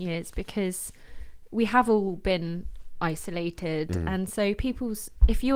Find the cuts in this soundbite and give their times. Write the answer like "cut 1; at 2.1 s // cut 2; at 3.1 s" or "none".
none